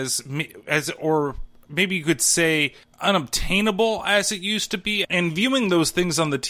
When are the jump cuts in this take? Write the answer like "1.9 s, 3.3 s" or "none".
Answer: 5.0 s